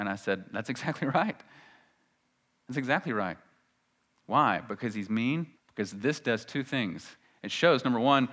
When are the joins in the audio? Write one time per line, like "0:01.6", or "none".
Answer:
0:05.5